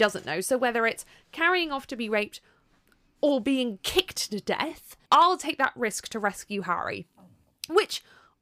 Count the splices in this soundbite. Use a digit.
1